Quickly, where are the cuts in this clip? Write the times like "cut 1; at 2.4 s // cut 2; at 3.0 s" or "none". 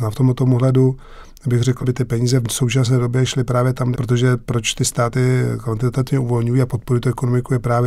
cut 1; at 1.8 s // cut 2; at 3.9 s